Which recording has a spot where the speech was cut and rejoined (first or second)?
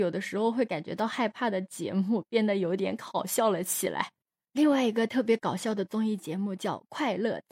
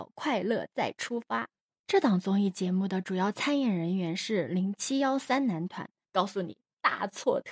second